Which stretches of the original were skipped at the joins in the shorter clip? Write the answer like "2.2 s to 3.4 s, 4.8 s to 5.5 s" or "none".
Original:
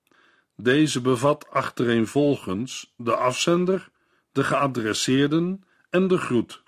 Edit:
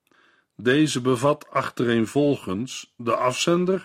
none